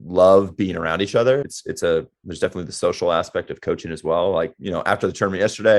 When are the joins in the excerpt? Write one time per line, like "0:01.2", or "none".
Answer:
0:01.4